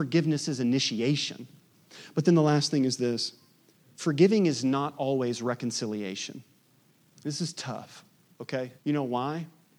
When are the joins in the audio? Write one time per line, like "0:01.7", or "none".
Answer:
0:08.8